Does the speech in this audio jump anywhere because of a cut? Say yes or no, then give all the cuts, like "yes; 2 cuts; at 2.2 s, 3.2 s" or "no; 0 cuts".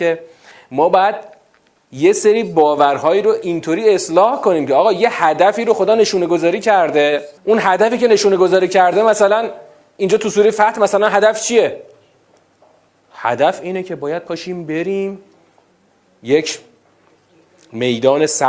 yes; 1 cut; at 7.4 s